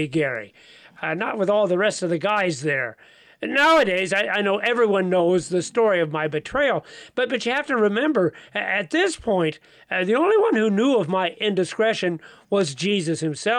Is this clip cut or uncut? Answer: uncut